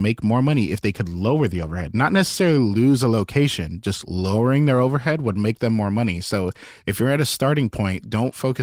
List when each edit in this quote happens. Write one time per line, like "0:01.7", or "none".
none